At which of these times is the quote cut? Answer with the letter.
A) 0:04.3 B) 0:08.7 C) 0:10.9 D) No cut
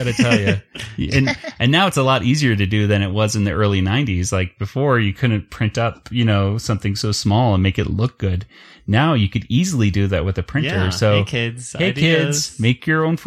D